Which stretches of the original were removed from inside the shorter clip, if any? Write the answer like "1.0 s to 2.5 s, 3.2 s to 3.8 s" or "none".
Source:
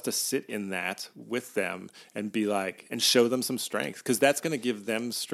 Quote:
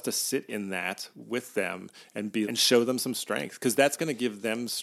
2.4 s to 2.9 s